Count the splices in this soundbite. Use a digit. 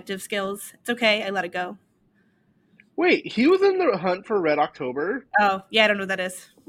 1